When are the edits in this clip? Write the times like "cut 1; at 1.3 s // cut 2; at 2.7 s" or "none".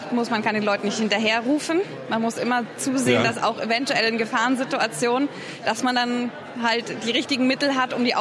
none